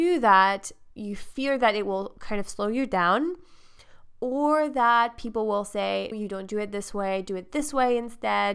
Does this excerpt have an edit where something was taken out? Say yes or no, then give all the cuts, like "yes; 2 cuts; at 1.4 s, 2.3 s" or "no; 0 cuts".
yes; 2 cuts; at 0.9 s, 6.1 s